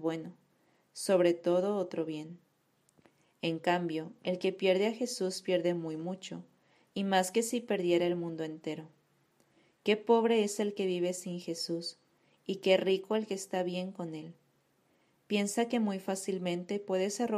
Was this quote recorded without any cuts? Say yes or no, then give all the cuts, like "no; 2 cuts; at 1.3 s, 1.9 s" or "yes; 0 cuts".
yes; 0 cuts